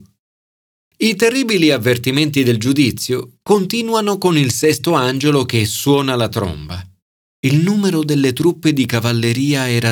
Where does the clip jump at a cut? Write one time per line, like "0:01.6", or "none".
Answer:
0:07.3